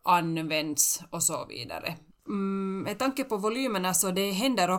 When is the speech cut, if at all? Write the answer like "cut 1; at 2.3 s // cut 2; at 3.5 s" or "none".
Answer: cut 1; at 2.1 s